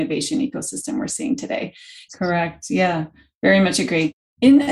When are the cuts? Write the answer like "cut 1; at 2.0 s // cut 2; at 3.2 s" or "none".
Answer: cut 1; at 2.1 s